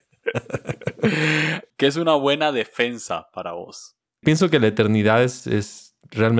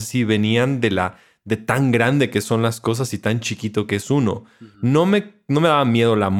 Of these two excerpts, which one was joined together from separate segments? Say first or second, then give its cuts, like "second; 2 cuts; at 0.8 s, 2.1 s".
first; 2 cuts; at 1.7 s, 4.2 s